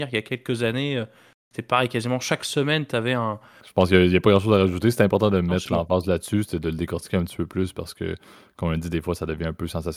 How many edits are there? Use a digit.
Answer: 1